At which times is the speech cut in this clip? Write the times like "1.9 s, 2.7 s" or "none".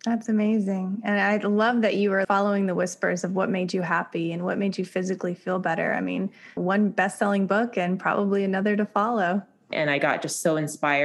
2.2 s, 6.6 s, 9.7 s